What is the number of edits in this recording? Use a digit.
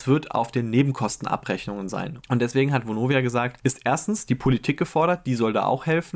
1